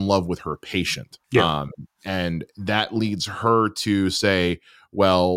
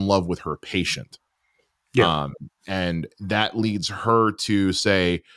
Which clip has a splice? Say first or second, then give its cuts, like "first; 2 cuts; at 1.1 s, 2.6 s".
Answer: first; 1 cut; at 1.2 s